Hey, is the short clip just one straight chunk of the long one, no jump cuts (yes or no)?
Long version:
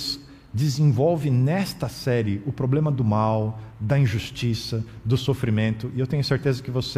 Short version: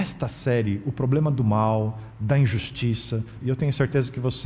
no